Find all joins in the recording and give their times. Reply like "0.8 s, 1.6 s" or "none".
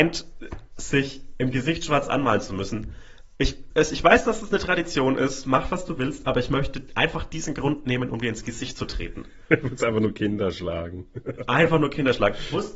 3.7 s